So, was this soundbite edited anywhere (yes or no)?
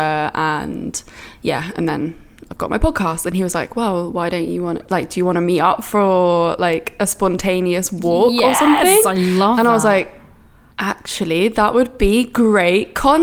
no